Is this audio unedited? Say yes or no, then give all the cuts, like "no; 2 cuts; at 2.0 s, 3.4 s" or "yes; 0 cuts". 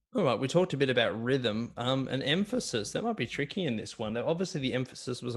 yes; 0 cuts